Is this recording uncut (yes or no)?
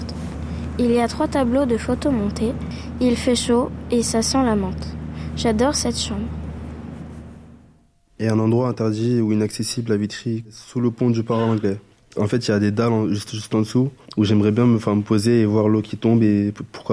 yes